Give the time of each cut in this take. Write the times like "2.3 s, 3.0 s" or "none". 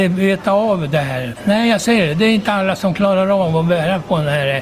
1.4 s